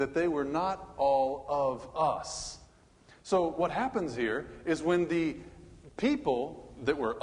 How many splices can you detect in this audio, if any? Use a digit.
0